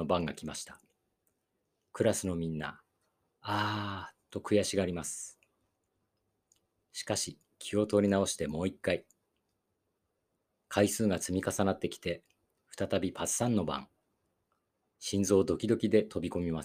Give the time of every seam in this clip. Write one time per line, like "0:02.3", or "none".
0:01.9

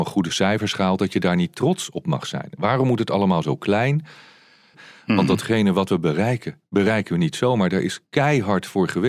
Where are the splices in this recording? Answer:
0:04.7

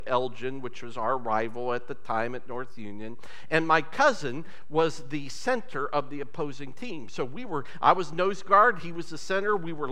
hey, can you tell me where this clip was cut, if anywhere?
none

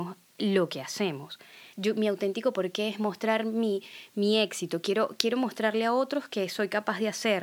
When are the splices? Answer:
0:01.7

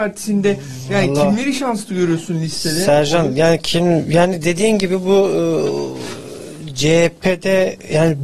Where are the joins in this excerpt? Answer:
none

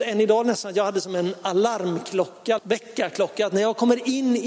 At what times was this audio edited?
0:02.6

